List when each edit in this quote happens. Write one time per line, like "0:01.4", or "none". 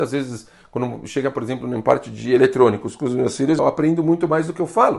0:03.6